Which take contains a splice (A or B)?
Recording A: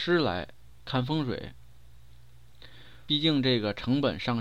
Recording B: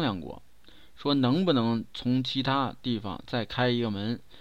A